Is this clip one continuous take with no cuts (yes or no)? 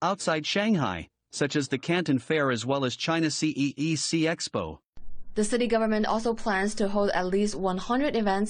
yes